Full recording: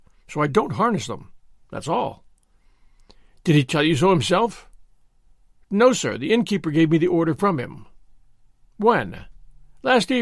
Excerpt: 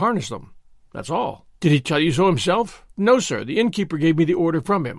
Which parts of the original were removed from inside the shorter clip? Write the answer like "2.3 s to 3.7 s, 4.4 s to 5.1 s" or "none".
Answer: 2.3 s to 3.4 s, 4.7 s to 5.6 s